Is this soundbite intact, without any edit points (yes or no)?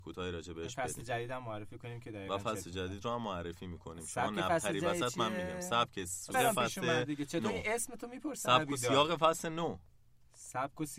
no